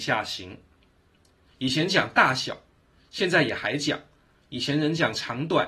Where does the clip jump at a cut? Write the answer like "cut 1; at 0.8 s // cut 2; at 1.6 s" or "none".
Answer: cut 1; at 1.5 s // cut 2; at 4.3 s